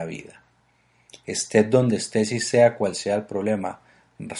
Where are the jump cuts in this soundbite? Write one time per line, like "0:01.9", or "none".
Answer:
none